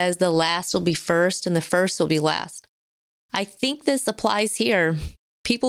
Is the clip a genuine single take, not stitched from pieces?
yes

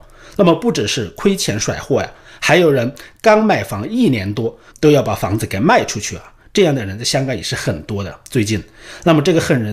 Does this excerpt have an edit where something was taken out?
yes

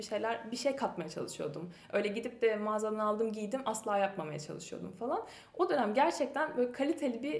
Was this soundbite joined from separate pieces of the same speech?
no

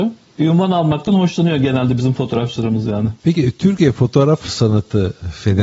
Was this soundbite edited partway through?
no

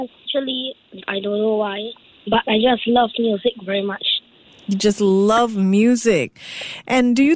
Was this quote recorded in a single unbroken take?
yes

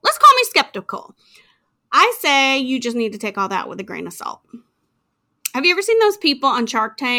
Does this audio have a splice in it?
no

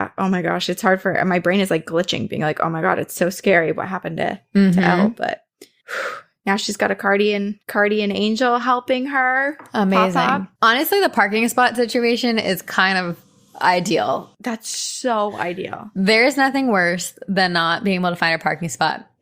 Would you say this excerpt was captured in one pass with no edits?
no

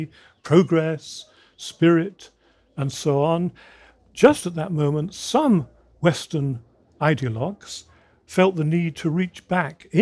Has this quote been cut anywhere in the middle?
no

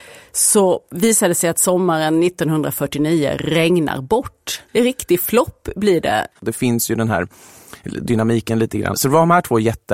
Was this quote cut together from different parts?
yes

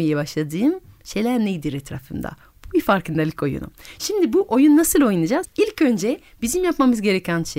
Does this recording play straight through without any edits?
no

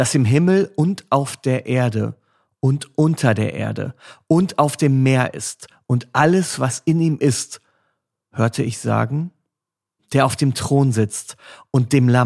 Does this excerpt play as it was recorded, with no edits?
no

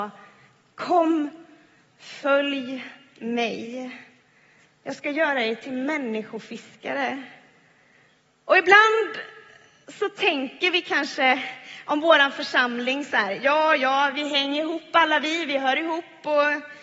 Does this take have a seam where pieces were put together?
yes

